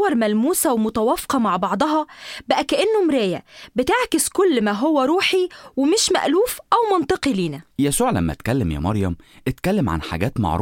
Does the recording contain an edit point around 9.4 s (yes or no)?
no